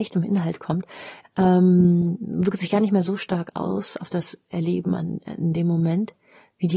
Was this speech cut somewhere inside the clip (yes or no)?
yes